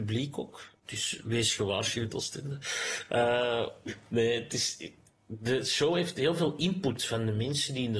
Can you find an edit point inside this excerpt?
no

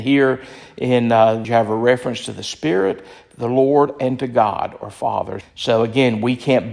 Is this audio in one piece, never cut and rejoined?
no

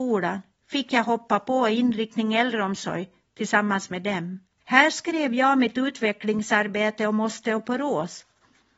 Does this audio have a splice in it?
yes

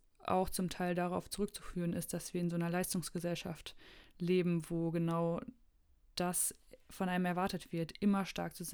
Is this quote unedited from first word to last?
yes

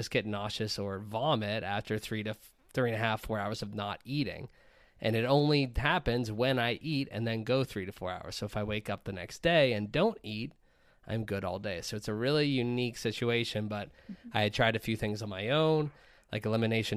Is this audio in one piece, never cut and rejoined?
yes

